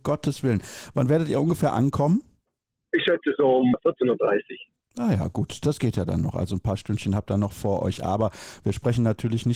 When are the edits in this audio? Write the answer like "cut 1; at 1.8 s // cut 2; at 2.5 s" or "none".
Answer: none